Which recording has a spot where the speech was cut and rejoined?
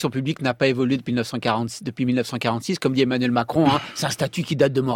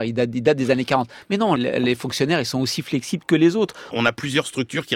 second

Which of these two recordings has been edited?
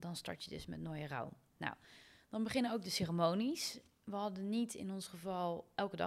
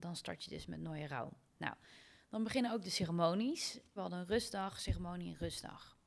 second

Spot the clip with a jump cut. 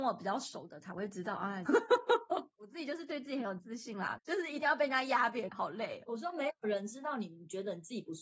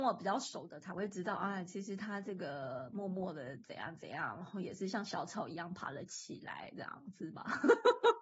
first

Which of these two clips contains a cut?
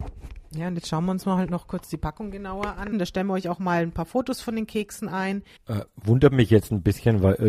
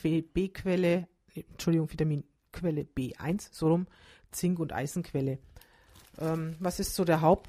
first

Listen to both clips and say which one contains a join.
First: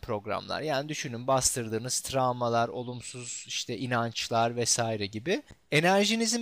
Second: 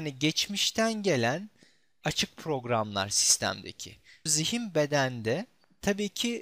second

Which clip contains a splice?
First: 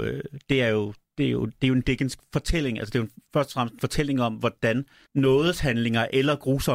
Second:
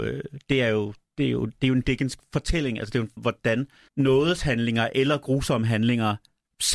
second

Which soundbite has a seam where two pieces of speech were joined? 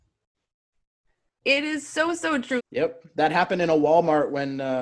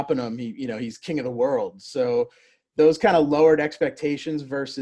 first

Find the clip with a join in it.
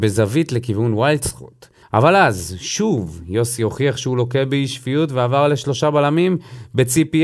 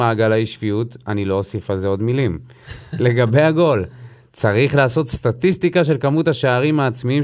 first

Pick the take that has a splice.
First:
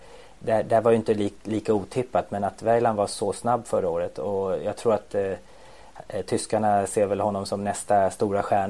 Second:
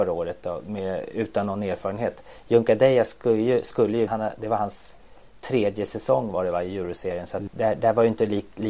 second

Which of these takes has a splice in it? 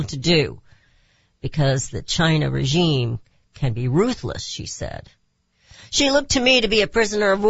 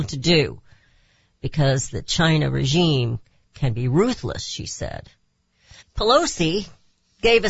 second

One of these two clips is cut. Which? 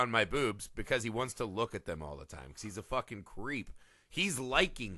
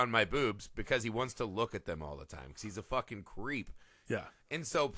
second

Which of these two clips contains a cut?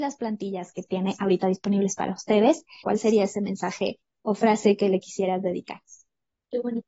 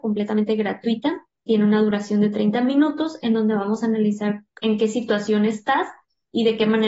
first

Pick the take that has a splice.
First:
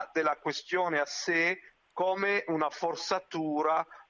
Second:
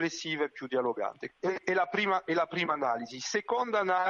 second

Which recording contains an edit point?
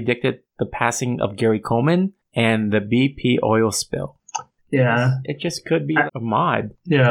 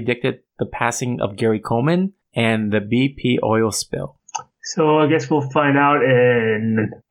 first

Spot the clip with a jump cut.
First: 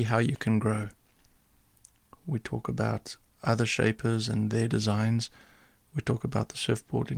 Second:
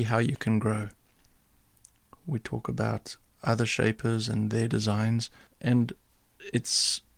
second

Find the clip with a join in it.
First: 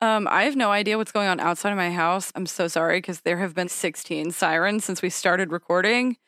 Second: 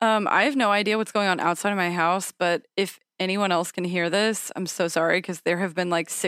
first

